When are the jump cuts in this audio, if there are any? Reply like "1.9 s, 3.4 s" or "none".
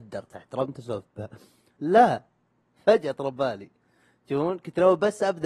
1.8 s